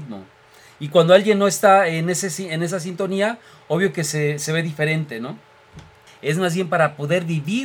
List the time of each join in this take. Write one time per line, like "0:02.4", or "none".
0:06.1